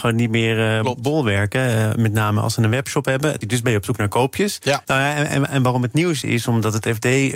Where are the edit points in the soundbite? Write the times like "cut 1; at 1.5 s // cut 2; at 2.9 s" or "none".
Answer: cut 1; at 3.4 s // cut 2; at 4.8 s // cut 3; at 6.2 s